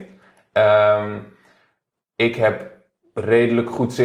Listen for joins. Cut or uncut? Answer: uncut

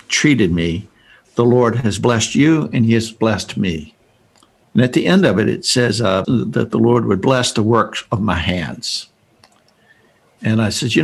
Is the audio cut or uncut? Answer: cut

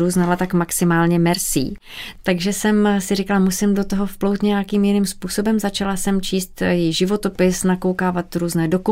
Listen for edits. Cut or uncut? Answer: uncut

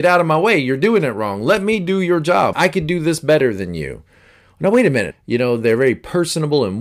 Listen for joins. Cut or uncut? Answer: cut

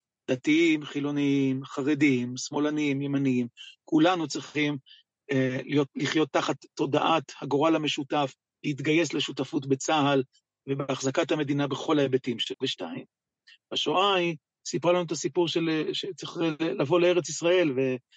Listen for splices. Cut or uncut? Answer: cut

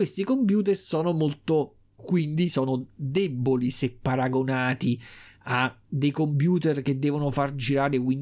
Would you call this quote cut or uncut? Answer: cut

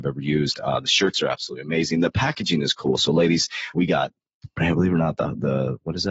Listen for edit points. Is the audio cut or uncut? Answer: cut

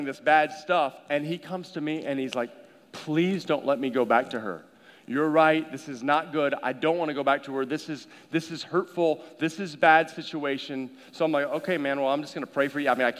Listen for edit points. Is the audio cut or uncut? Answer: uncut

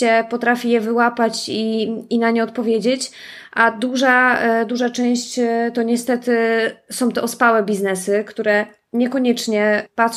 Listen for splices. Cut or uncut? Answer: uncut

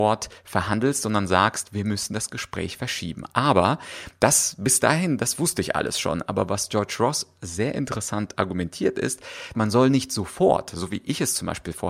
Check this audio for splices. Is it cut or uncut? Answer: cut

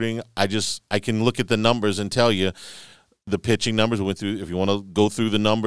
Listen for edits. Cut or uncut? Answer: uncut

